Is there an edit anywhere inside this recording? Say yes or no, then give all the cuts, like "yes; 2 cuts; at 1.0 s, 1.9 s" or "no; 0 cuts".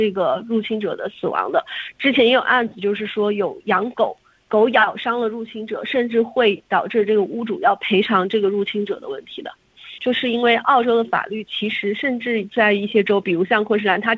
yes; 1 cut; at 10.0 s